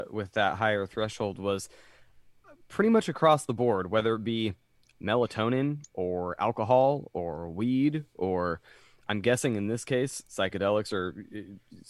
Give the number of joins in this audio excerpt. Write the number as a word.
zero